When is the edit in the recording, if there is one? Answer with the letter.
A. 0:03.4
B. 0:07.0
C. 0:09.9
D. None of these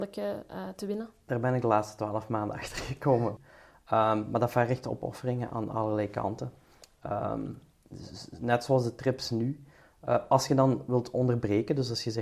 A